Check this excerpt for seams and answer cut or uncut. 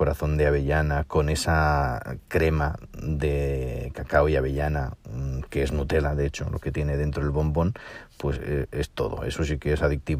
cut